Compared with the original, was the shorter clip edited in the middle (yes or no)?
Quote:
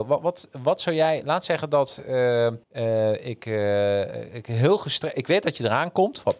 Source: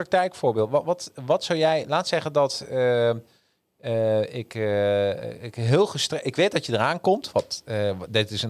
yes